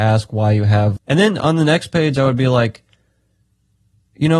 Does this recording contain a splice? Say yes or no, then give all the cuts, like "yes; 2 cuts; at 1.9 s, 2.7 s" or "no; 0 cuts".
yes; 1 cut; at 1.0 s